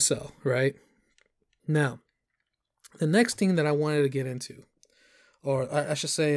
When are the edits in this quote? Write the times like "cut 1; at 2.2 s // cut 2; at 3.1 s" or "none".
cut 1; at 1.6 s